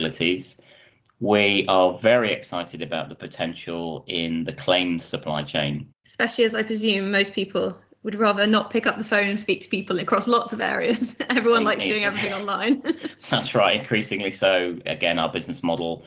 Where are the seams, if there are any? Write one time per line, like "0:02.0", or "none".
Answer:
0:05.9